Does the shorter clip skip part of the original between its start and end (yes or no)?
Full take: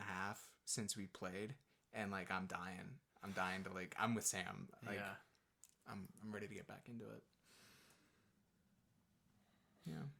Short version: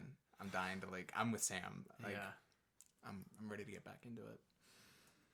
no